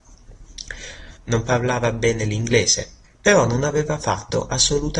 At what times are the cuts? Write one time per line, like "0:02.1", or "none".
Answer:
0:01.2
0:03.0